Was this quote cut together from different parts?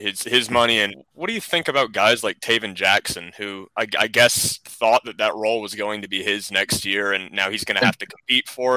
yes; 1 cut; at 0.9 s

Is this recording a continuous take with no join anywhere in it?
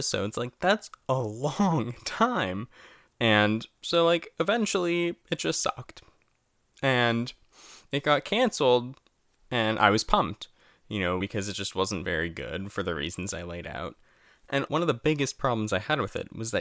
no; 2 cuts; at 11.2 s, 14.7 s

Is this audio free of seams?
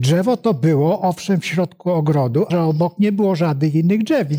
no; 1 cut; at 2.5 s

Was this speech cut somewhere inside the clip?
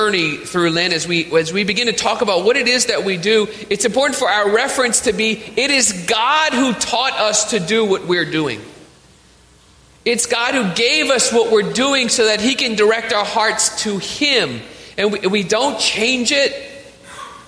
no; 0 cuts

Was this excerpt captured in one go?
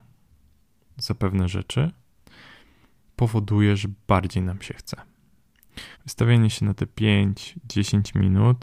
no; 1 cut; at 5.9 s

